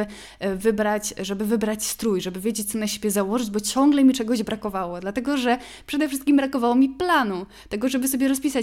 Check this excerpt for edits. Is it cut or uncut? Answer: uncut